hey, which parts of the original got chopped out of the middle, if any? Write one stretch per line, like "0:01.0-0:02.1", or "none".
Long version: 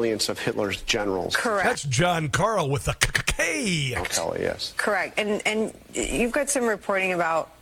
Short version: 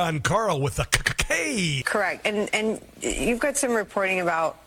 0:03.9-0:04.7